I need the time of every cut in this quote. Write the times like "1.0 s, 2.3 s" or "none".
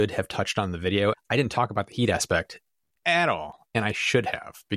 1.1 s